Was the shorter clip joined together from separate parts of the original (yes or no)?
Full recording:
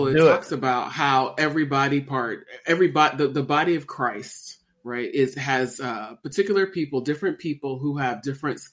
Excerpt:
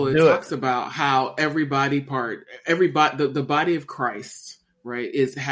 no